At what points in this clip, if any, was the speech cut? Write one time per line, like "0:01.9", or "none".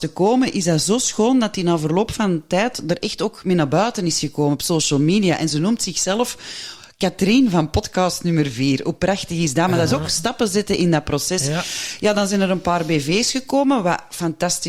none